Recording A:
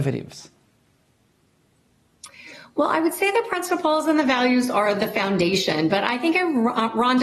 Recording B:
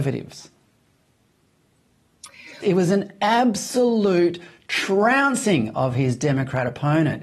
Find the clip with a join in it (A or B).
B